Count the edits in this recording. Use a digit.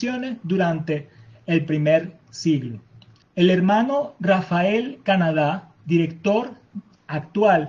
1